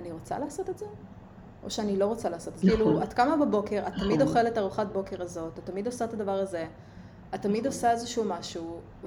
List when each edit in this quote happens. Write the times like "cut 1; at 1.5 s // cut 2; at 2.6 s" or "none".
cut 1; at 2.6 s